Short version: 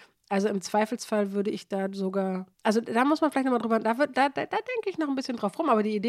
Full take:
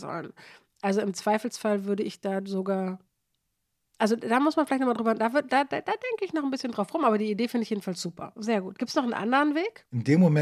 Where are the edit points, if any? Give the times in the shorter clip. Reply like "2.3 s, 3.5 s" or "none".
2.5 s